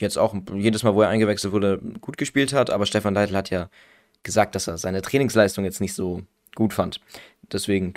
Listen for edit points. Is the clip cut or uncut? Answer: uncut